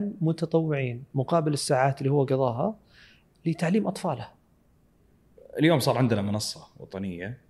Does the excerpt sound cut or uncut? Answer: cut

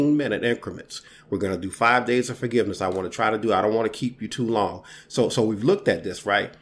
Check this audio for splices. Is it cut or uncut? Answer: uncut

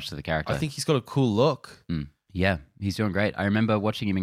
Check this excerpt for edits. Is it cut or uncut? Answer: cut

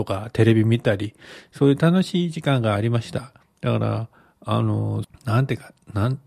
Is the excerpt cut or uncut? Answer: cut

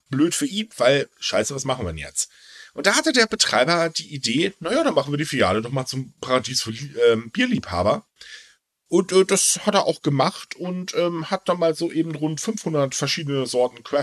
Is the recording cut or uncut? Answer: uncut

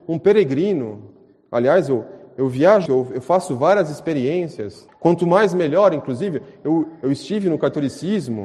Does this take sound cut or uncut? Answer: cut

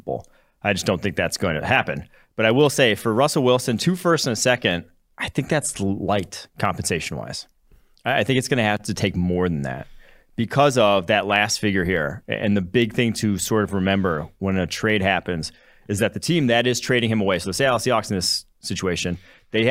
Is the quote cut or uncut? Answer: uncut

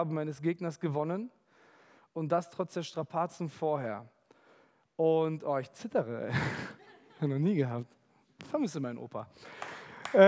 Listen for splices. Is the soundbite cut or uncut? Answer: uncut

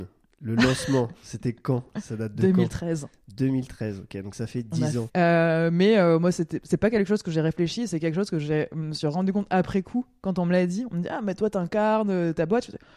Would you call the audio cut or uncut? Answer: cut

